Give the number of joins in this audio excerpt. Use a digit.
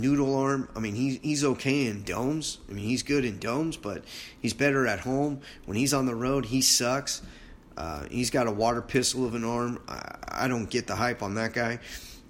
0